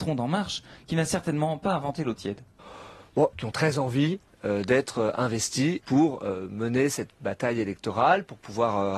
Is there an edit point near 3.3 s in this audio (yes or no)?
yes